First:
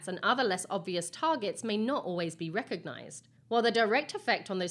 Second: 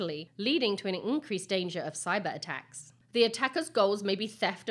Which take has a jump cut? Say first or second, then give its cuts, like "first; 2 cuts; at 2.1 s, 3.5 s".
second; 1 cut; at 3.0 s